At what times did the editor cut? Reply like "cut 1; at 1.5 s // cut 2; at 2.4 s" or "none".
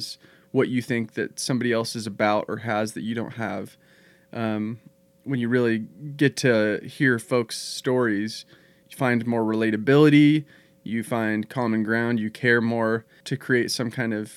cut 1; at 8.8 s // cut 2; at 13.2 s